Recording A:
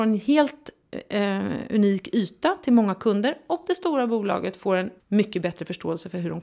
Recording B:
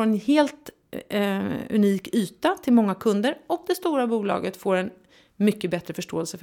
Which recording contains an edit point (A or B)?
A